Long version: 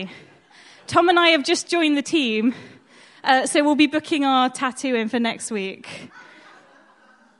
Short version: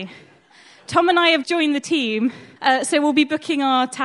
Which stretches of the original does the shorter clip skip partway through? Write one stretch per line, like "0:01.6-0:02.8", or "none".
0:01.4-0:01.7
0:02.8-0:03.2